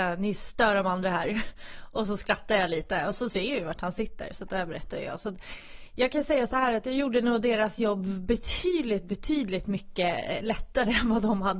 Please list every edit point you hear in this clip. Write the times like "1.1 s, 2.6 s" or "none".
none